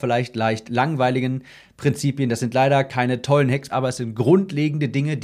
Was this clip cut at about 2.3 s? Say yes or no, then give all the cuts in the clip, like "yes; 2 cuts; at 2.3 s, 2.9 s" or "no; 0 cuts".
no; 1 cut; at 3.7 s